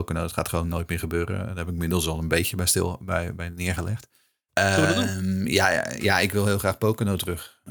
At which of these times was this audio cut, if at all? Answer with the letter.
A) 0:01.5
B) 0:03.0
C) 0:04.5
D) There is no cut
C